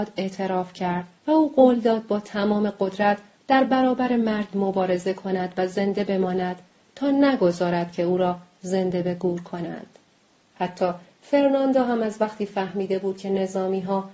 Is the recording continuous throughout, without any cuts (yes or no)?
no